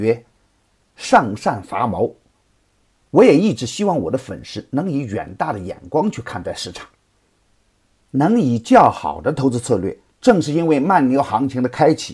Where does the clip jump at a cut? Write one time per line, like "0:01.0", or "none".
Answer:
0:10.1